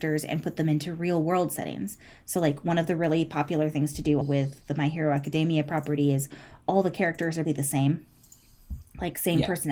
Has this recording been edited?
yes; 2 cuts; at 4.2 s, 7.4 s

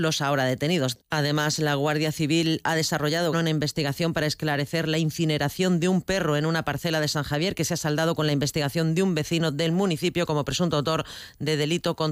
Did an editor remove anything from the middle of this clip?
yes; 2 cuts; at 0.9 s, 3.3 s

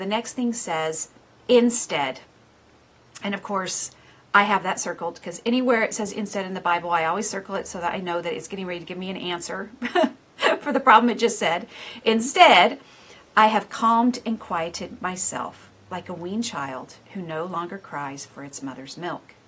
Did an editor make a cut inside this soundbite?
no; 0 cuts

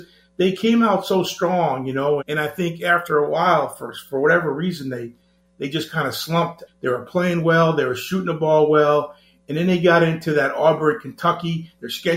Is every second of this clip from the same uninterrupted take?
no; 2 cuts; at 2.2 s, 6.7 s

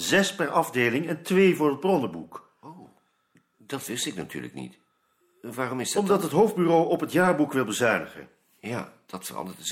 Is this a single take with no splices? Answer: yes; 0 cuts

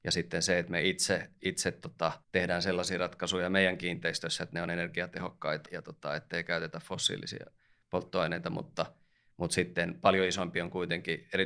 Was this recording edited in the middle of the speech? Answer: yes; 2 cuts; at 2.2 s, 5.7 s

